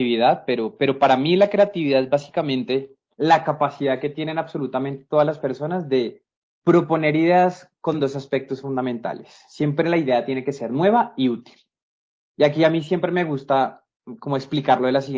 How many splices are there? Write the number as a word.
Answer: zero